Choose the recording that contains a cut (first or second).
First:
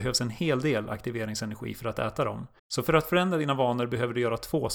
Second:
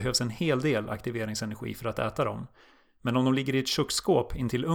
first